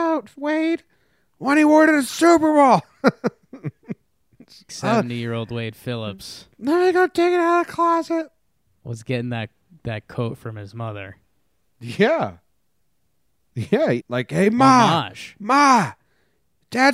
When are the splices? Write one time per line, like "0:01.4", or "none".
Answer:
0:04.7
0:14.0